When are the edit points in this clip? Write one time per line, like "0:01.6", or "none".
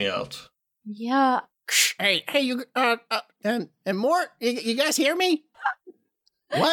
0:03.4
0:05.5